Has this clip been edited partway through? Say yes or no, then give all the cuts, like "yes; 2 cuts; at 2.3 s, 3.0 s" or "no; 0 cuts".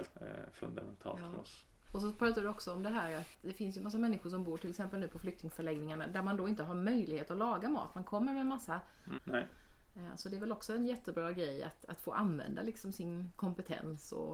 yes; 1 cut; at 9.1 s